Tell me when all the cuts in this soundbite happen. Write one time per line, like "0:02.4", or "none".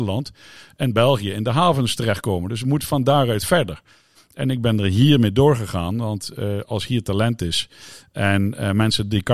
0:04.1